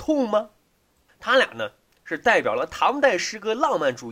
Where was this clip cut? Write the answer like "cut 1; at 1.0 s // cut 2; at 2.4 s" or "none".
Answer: cut 1; at 1.1 s